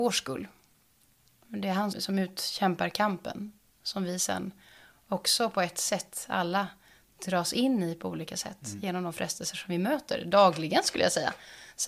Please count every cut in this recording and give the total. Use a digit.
1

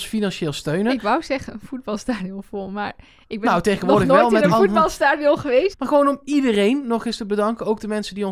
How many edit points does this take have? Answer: 1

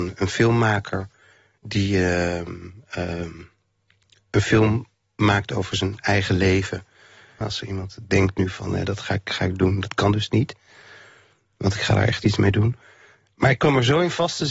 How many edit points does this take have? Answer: 1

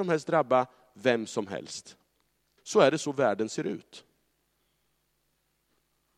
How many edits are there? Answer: 1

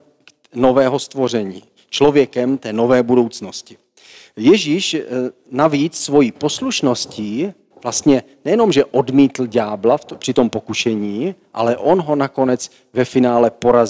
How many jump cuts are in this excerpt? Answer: 0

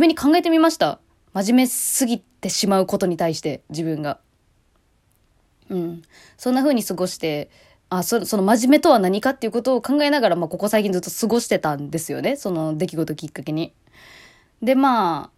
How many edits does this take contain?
1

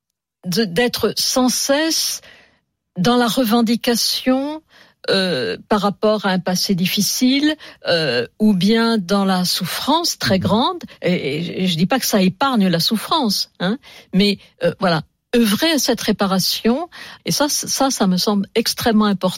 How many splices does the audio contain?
1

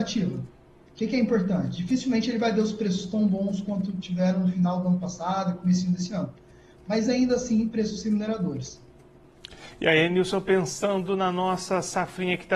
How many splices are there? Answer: 0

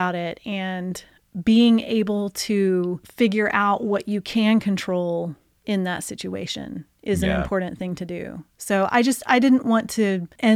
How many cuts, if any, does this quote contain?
0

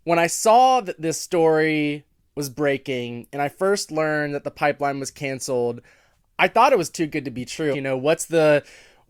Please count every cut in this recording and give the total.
1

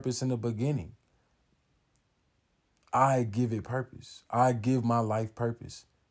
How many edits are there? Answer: 0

